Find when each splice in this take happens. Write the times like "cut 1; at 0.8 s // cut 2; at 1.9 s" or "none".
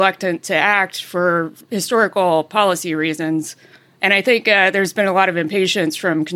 none